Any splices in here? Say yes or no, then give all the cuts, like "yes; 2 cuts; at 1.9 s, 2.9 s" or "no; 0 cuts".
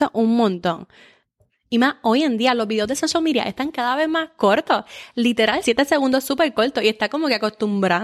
yes; 1 cut; at 5.6 s